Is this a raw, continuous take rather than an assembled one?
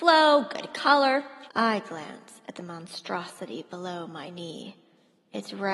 no; 1 cut; at 1.5 s

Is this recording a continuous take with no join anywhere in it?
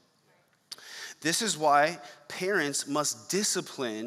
yes; 0 cuts

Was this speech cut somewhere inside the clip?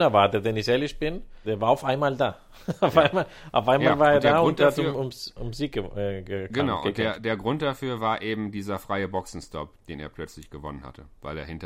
yes; 3 cuts; at 1.4 s, 7.2 s, 9.8 s

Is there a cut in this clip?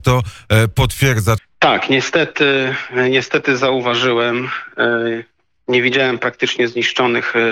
yes; 1 cut; at 1.4 s

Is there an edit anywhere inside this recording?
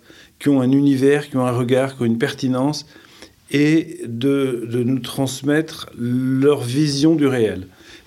no; 0 cuts

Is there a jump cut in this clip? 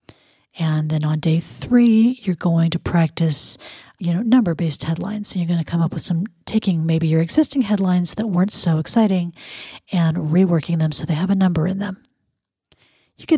no; 0 cuts

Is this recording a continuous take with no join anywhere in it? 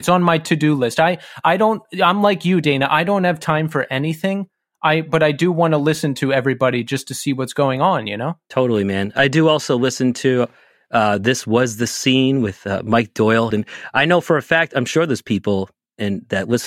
no; 1 cut; at 13.5 s

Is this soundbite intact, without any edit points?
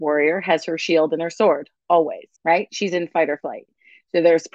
no; 1 cut; at 2.4 s

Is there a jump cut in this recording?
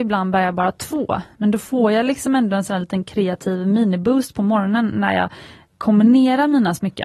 no; 0 cuts

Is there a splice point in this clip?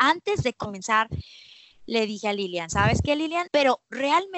yes; 1 cut; at 3.5 s

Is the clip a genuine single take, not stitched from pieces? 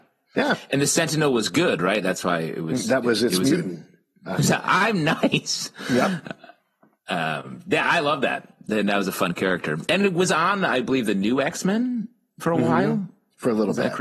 no; 1 cut; at 4.3 s

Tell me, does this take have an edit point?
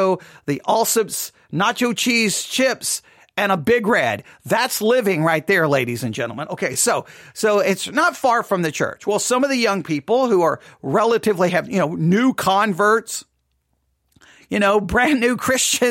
no; 0 cuts

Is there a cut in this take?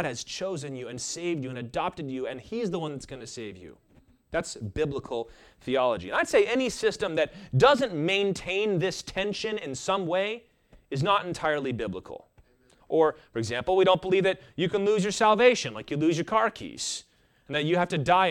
yes; 1 cut; at 12.8 s

